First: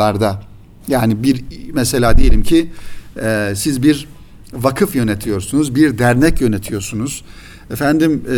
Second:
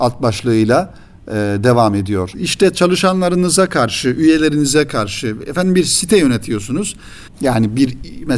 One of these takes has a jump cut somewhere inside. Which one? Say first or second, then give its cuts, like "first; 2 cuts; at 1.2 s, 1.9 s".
second; 2 cuts; at 2.3 s, 7.3 s